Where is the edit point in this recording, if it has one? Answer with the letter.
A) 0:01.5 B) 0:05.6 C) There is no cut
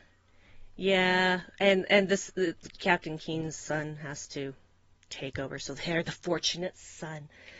C